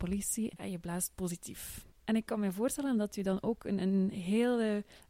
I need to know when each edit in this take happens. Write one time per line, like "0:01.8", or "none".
0:01.9